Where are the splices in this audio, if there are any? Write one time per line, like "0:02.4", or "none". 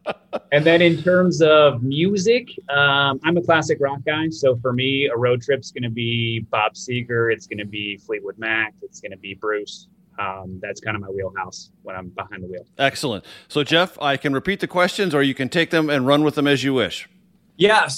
none